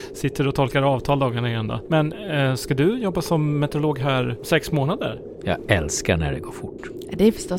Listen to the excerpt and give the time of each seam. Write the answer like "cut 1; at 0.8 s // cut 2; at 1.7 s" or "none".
cut 1; at 1.9 s // cut 2; at 5.4 s